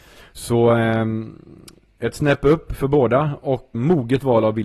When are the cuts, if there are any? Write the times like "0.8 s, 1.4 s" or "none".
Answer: 3.7 s